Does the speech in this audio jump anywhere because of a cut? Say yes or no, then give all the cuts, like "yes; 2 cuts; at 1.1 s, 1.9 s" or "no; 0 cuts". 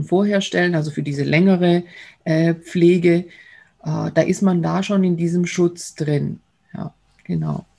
no; 0 cuts